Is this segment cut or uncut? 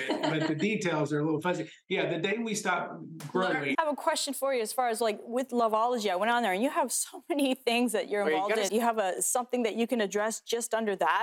cut